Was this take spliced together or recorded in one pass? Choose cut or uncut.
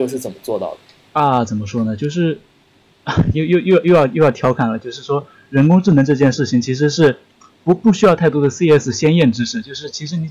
uncut